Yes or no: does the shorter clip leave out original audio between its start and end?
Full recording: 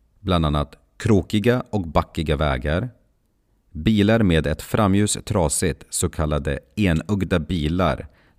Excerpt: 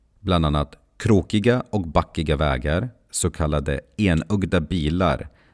yes